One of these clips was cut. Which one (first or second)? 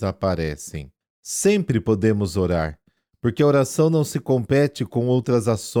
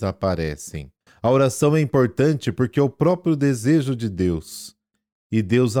second